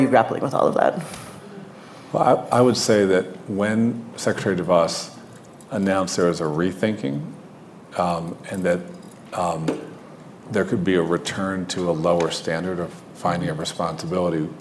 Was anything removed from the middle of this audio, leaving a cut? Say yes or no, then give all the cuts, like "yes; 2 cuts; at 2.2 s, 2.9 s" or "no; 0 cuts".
no; 0 cuts